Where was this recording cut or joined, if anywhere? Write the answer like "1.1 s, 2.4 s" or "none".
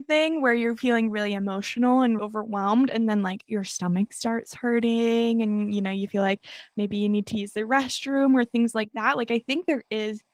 2.2 s